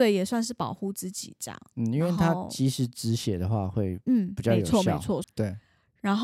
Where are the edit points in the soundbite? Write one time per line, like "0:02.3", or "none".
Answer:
0:05.2